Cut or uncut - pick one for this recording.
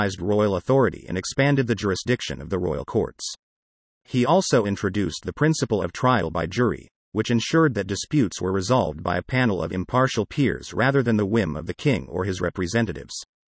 uncut